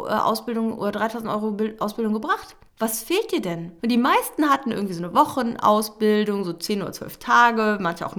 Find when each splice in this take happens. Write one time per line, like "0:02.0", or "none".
0:02.7
0:03.8